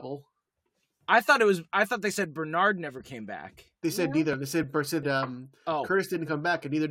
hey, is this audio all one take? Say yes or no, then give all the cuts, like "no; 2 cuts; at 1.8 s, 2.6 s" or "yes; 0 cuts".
no; 2 cuts; at 1.0 s, 5.0 s